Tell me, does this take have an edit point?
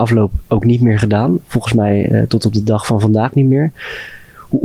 no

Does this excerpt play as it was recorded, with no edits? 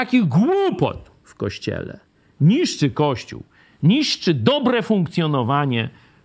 yes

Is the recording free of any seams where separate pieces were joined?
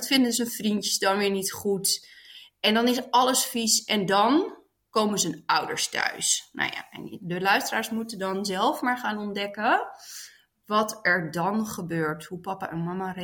yes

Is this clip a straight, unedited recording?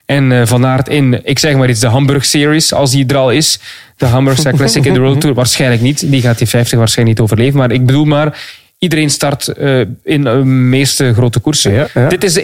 yes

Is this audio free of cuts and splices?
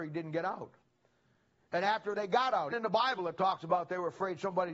no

